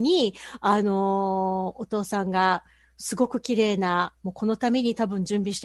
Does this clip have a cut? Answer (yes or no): no